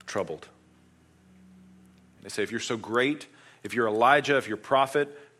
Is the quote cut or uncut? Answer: cut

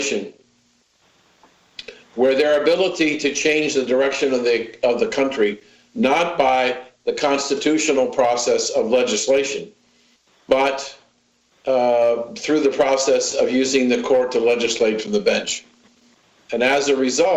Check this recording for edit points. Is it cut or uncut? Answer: cut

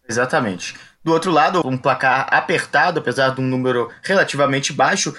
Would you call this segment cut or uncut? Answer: cut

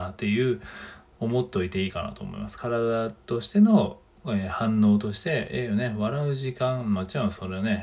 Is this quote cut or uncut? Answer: uncut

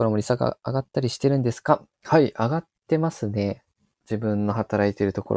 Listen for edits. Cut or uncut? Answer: cut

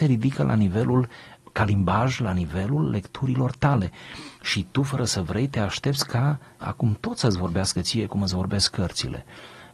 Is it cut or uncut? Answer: uncut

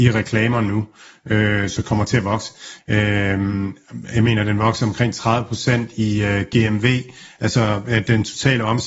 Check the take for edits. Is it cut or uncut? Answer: cut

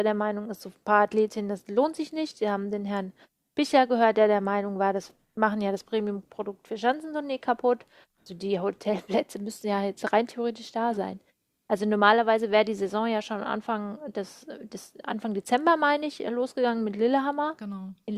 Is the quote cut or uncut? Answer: cut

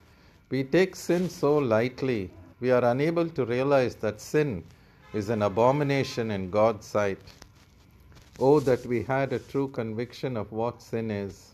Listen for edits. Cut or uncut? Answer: cut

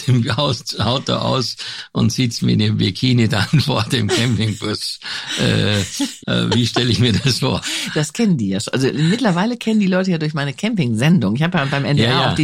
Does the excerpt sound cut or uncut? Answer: cut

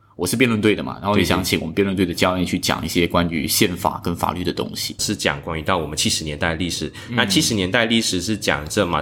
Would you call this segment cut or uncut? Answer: cut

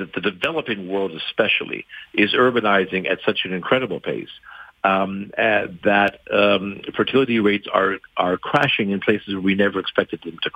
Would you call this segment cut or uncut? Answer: uncut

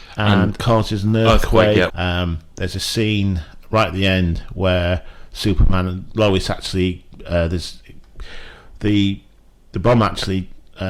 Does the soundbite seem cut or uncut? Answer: cut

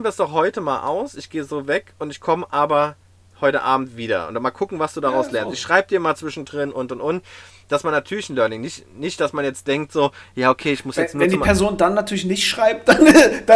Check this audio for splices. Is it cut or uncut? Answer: uncut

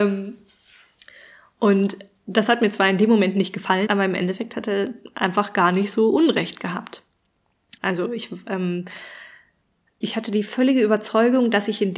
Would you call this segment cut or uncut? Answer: cut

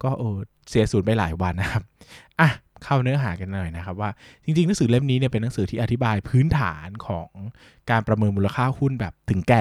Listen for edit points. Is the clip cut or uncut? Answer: cut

